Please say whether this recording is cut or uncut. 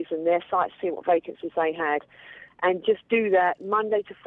uncut